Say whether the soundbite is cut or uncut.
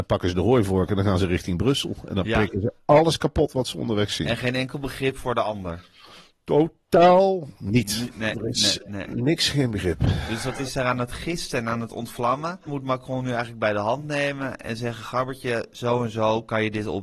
cut